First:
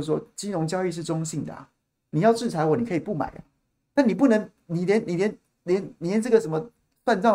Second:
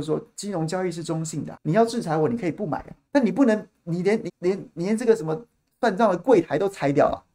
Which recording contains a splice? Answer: second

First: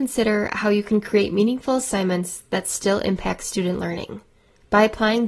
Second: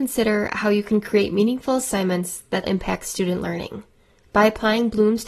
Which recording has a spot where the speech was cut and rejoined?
second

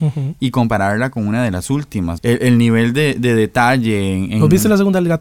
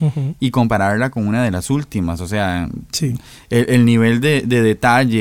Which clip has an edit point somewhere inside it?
first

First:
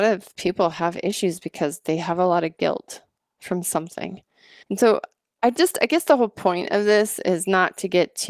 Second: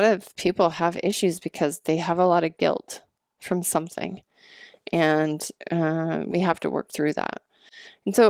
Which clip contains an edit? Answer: first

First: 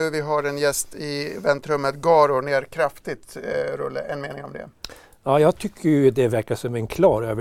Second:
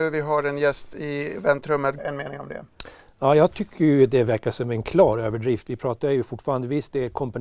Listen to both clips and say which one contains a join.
second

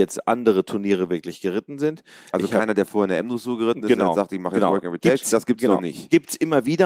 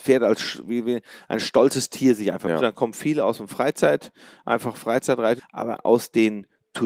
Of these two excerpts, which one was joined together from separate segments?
second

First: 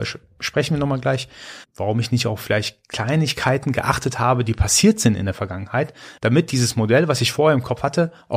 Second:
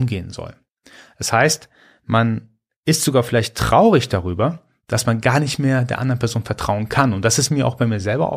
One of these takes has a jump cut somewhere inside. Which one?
first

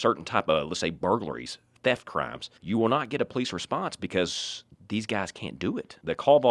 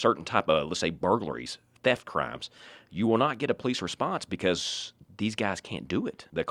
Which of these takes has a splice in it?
first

